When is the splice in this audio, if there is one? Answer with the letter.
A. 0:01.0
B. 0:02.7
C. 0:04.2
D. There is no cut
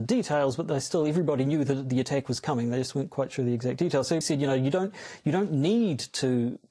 C